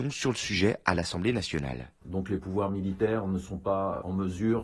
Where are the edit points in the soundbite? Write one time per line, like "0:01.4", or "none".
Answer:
0:02.0